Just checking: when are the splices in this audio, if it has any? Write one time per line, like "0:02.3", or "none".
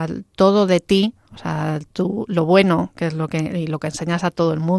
none